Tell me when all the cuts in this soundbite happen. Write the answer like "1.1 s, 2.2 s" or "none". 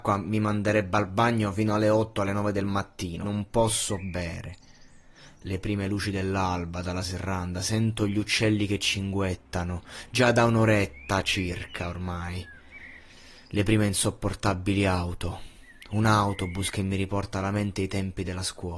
3.2 s